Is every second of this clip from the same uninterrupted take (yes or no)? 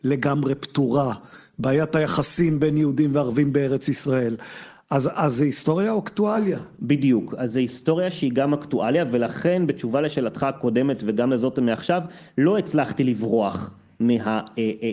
yes